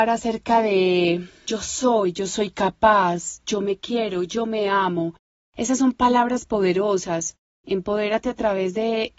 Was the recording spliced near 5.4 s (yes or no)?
no